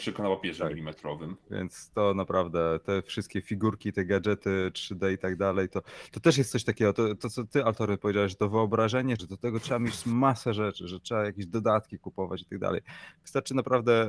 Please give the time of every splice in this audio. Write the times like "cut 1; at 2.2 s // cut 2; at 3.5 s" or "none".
cut 1; at 7.2 s // cut 2; at 9.2 s